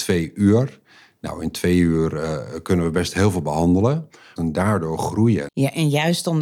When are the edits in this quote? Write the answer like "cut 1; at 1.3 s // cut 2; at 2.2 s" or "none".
cut 1; at 4.4 s // cut 2; at 5.5 s